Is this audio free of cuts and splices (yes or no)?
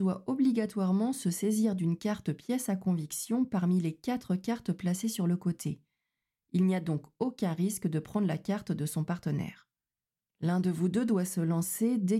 yes